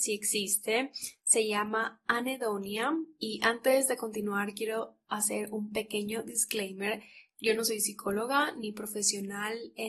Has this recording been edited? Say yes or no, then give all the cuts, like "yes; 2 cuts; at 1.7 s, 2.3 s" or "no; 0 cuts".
no; 0 cuts